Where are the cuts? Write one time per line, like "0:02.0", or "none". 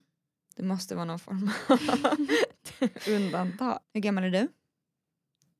0:03.8